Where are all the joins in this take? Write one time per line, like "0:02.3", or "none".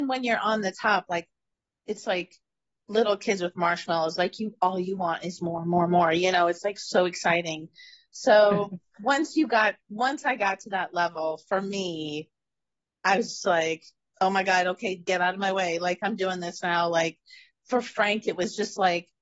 0:14.1

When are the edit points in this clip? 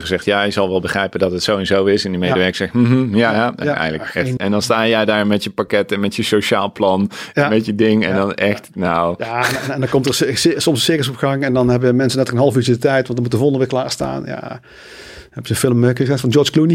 0:04.4

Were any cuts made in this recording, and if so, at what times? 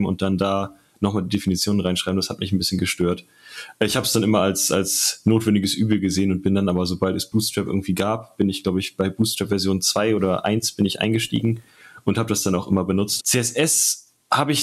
0:13.2

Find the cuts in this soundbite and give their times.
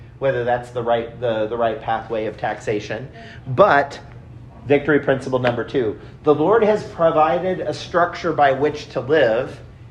none

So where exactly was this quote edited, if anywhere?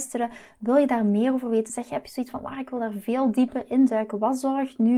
none

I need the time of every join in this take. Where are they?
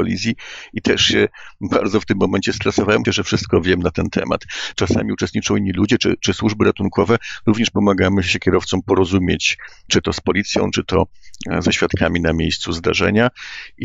0:03.1
0:04.7

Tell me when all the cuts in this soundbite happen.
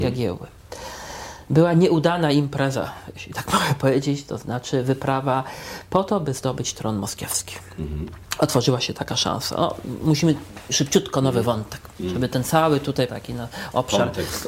0:13.1

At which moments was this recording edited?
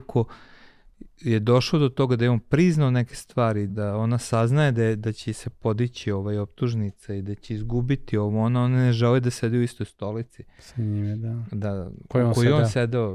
0:03.7

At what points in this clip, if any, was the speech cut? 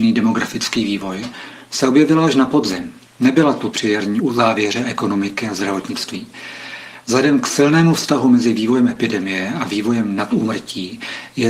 none

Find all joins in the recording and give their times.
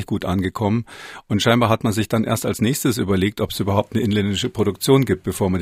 none

